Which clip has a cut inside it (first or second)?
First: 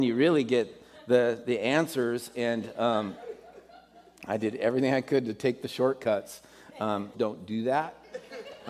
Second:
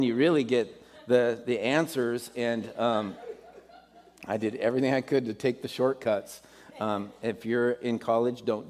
first